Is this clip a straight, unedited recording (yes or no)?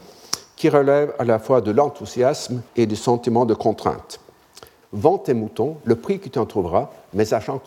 no